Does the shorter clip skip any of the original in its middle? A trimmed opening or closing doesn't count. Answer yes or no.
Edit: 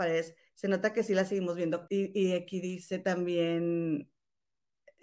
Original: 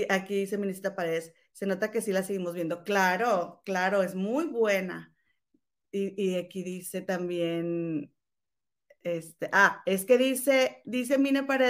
yes